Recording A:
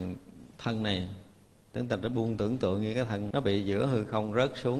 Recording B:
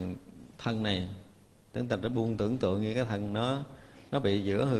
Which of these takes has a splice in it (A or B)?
A